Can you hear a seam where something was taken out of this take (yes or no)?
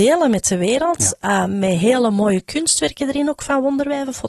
no